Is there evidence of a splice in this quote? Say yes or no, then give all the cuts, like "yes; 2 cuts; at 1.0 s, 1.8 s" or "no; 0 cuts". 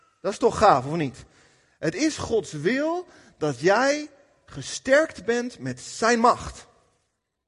no; 0 cuts